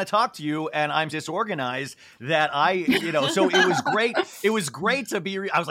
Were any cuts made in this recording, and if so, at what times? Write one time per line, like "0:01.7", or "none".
0:01.1